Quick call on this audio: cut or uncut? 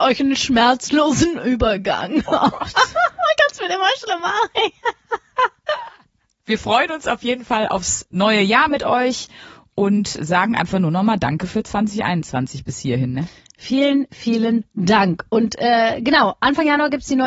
uncut